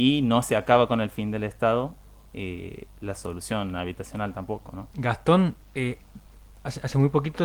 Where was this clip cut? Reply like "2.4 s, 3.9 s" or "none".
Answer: 4.9 s